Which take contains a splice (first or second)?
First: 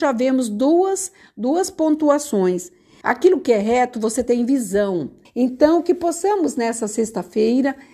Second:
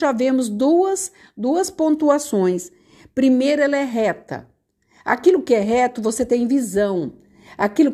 first